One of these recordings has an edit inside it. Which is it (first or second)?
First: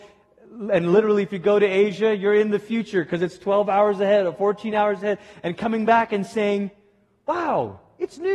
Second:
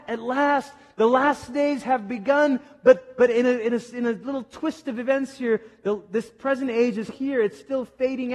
second